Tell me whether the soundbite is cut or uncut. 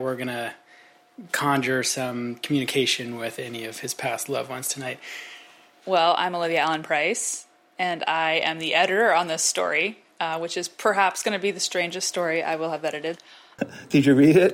cut